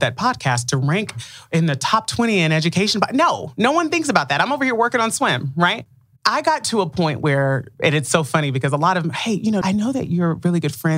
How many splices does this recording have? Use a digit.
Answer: 2